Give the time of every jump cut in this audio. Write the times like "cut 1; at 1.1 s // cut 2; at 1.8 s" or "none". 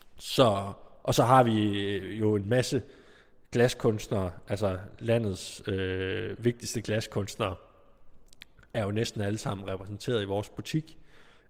none